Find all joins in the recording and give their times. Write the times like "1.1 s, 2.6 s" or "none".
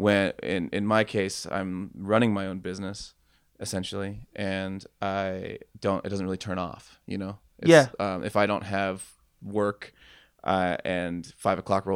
none